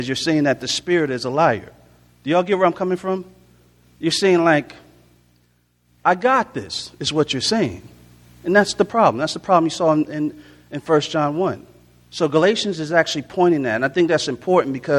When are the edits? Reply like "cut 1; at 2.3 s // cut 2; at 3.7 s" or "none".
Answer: none